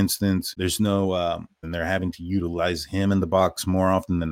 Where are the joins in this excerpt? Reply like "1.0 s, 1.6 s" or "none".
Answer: 1.6 s